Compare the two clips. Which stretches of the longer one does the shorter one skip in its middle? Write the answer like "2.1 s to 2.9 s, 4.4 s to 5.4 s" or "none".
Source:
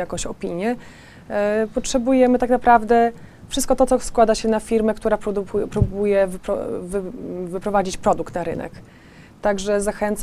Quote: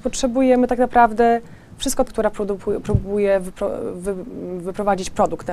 3.8 s to 4.9 s